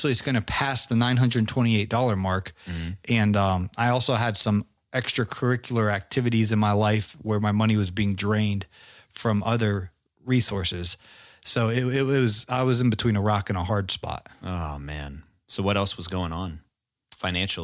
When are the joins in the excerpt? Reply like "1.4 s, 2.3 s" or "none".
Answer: none